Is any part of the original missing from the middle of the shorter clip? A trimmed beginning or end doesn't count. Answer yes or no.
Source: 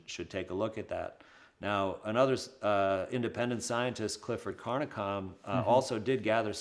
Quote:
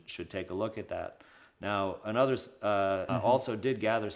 yes